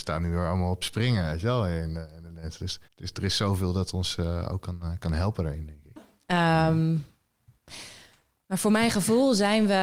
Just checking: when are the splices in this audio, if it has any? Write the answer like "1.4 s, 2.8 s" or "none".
2.8 s, 6.0 s